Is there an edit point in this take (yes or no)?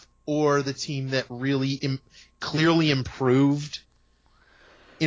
no